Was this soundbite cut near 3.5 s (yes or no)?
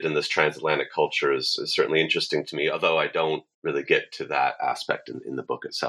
yes